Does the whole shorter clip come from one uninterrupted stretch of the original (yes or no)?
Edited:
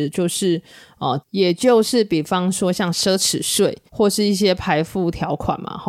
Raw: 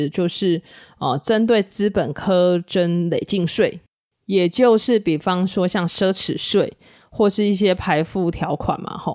no